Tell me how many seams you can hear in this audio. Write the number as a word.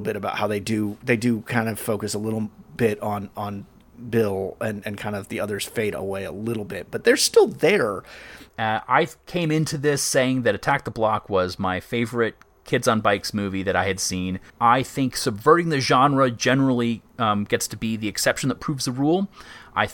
two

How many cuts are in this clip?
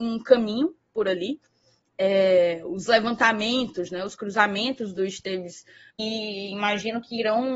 two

